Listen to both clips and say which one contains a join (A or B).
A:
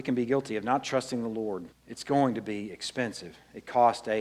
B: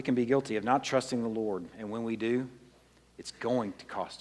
A